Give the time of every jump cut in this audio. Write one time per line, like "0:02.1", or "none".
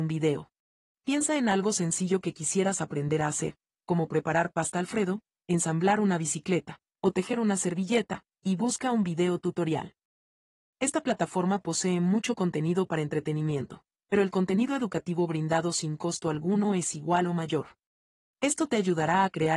0:00.9
0:18.2